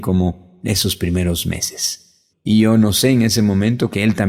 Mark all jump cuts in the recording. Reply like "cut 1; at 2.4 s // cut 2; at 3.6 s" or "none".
cut 1; at 2.3 s